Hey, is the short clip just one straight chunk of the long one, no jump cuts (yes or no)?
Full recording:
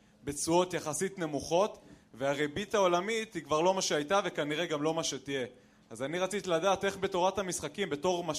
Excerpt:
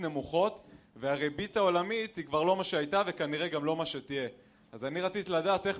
yes